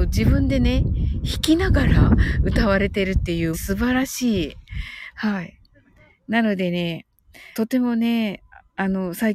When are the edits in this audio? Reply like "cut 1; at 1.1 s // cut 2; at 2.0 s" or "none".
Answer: cut 1; at 3.5 s // cut 2; at 5.1 s // cut 3; at 7.5 s